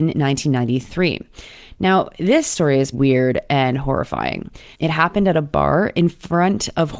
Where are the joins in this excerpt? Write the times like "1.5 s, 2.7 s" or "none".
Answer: 2.9 s, 4.7 s